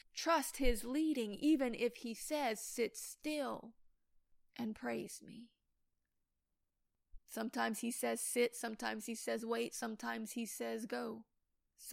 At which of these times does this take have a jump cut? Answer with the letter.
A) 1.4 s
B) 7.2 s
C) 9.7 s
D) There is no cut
B